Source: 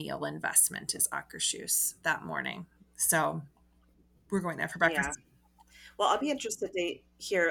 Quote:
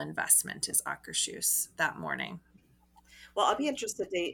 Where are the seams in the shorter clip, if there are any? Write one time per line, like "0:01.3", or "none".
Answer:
0:02.6